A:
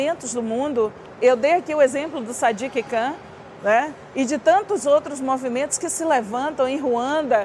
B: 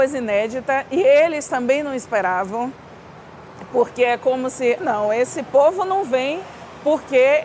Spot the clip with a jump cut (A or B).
B